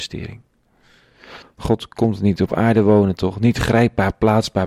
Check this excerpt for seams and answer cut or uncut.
cut